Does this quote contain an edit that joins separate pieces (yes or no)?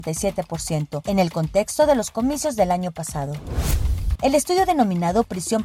yes